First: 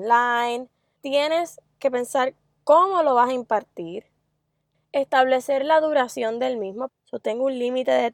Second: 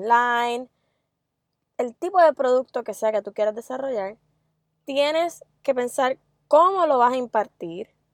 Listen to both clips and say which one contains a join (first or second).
first